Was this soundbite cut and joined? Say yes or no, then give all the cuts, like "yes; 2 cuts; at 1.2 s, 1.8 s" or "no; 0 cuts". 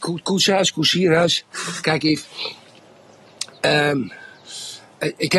no; 0 cuts